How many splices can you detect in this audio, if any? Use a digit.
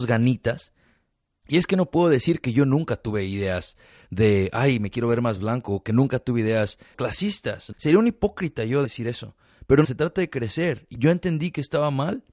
1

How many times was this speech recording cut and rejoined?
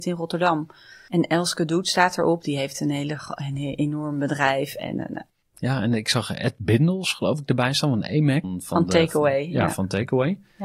1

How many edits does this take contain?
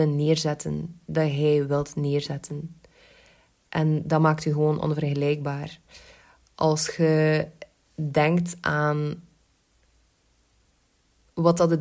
0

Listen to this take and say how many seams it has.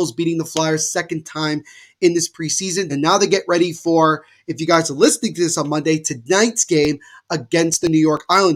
1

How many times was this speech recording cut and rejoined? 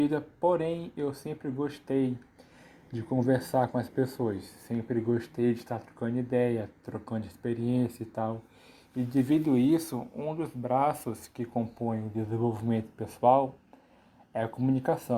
0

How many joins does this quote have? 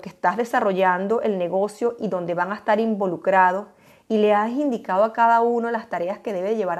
0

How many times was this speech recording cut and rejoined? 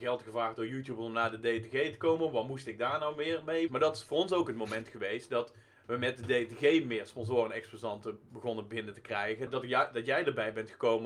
2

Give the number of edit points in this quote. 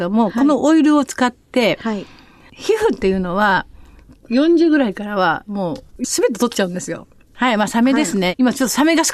3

